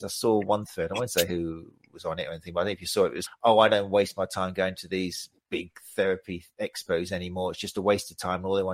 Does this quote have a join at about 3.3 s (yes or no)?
yes